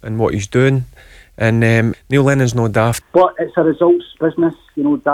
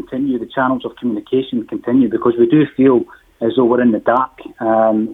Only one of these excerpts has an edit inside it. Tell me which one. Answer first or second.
first